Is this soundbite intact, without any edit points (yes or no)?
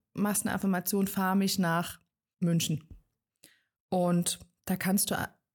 yes